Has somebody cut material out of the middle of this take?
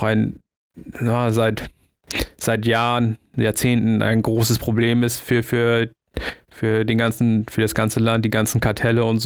no; 0 cuts

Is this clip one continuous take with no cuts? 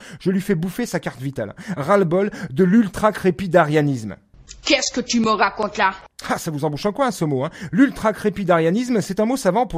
yes; 0 cuts

